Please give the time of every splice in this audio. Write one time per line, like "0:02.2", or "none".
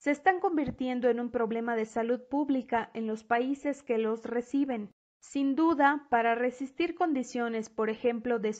none